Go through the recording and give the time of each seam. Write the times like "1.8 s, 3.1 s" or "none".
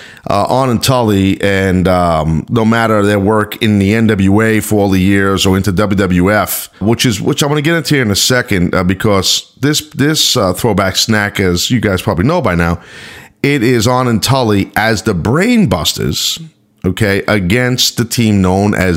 6.8 s